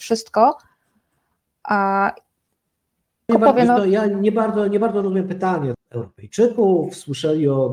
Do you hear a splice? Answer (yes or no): yes